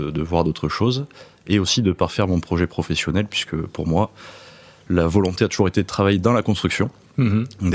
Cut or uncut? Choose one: uncut